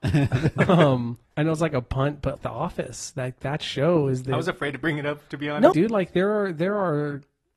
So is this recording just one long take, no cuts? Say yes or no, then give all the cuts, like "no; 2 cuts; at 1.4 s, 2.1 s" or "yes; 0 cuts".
no; 3 cuts; at 1.3 s, 2.4 s, 5.7 s